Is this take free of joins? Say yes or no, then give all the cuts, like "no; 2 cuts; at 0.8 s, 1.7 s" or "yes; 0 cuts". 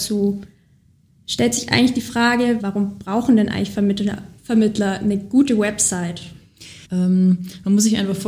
no; 2 cuts; at 2.6 s, 6.8 s